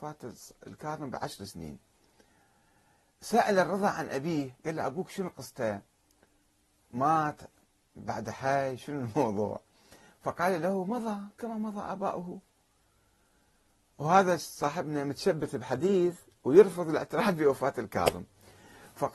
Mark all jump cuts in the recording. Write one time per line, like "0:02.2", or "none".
none